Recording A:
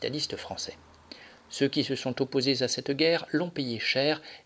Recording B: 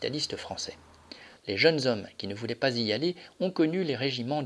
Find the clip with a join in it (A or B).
B